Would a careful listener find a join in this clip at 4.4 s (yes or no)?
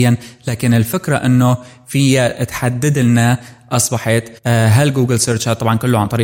yes